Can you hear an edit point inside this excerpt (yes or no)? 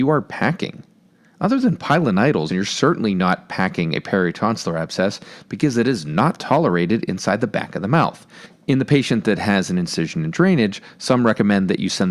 yes